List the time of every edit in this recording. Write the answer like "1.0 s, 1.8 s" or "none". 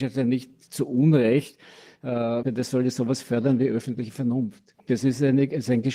2.4 s, 4.8 s